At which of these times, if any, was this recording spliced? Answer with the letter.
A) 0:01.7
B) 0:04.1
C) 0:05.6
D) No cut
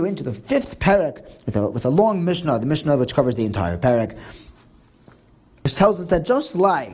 D